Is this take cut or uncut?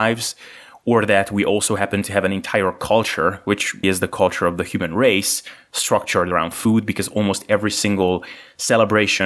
cut